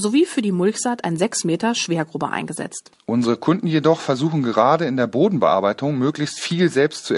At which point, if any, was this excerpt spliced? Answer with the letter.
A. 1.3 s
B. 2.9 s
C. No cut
B